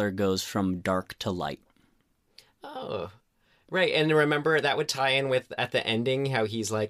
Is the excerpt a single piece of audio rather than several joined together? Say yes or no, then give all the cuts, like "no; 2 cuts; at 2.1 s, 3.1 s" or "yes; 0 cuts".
yes; 0 cuts